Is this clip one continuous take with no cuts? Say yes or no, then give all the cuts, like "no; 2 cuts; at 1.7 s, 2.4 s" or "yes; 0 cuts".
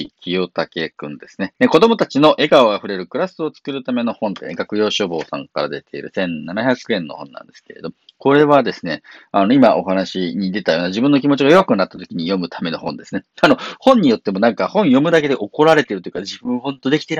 no; 1 cut; at 1.5 s